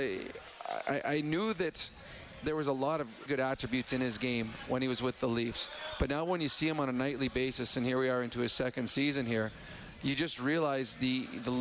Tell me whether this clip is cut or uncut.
cut